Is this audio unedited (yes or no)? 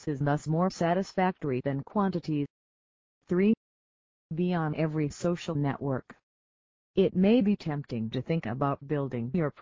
yes